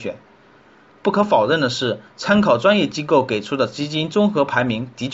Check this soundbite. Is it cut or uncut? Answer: uncut